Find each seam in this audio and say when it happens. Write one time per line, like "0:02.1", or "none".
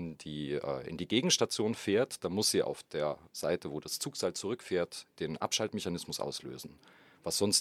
0:03.3